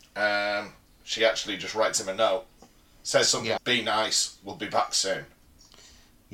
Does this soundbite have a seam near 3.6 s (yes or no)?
yes